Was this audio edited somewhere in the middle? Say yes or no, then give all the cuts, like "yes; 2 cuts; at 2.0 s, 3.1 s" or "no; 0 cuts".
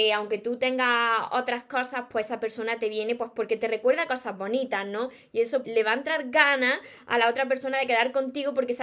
yes; 1 cut; at 5.6 s